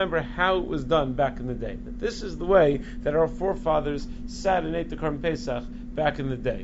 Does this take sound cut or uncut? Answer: uncut